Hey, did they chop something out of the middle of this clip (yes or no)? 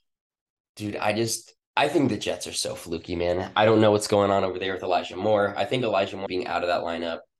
yes